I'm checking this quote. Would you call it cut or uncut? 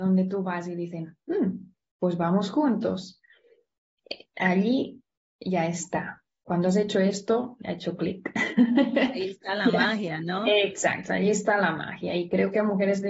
uncut